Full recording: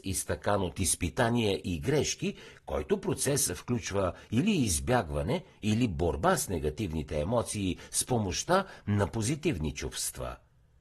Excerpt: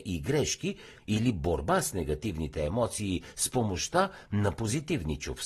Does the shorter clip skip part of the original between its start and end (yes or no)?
yes